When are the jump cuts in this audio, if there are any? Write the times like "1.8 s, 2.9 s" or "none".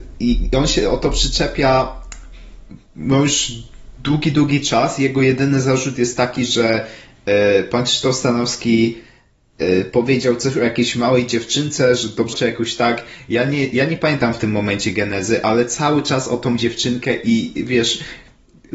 12.3 s